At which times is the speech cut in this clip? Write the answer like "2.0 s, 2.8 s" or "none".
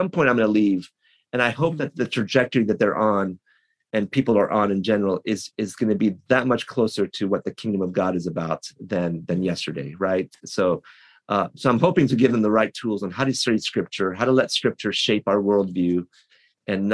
none